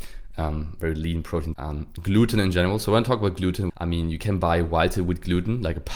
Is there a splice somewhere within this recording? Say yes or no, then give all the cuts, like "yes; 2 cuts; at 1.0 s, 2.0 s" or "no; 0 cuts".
yes; 2 cuts; at 1.5 s, 3.7 s